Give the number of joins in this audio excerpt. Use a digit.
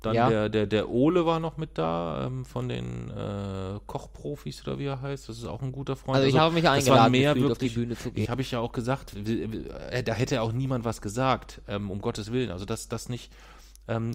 1